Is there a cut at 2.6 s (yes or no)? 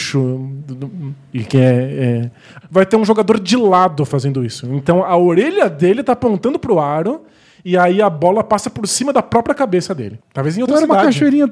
yes